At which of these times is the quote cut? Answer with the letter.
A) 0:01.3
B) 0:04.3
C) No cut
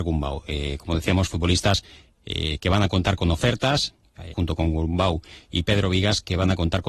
B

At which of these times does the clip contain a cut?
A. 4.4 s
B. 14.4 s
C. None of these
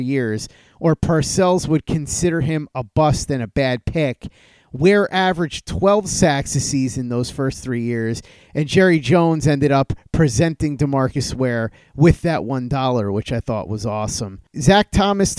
C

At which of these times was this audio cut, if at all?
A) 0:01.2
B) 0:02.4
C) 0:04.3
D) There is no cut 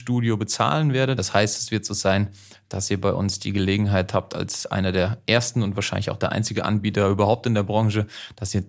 A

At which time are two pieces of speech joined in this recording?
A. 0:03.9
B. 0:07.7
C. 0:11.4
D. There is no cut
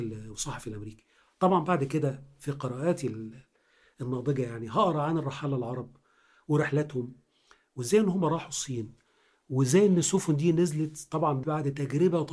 C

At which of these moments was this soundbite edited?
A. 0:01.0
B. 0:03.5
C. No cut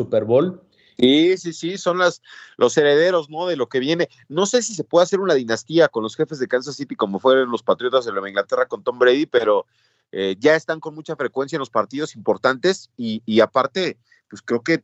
A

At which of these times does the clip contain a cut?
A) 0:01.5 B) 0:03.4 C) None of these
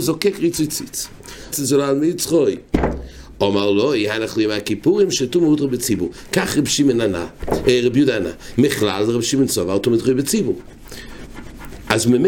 A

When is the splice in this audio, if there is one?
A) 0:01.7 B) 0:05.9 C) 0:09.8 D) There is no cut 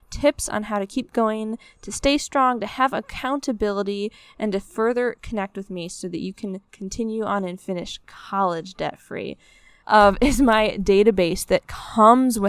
C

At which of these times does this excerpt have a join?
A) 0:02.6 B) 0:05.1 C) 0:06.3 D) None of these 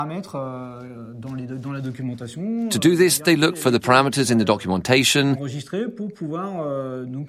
D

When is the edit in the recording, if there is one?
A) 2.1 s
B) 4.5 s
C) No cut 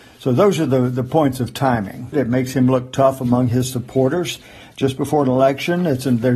A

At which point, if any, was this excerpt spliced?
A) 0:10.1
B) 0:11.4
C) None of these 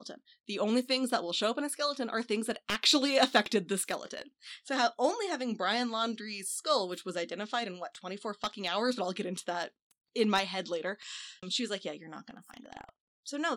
B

